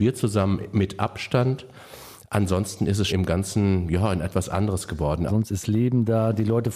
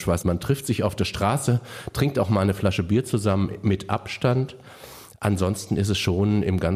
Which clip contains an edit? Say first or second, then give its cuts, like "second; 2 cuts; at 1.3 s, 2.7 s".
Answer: first; 2 cuts; at 3.1 s, 5.3 s